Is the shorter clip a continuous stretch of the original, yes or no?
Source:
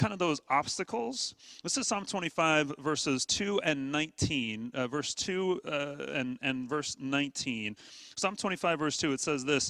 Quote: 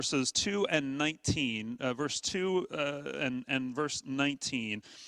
yes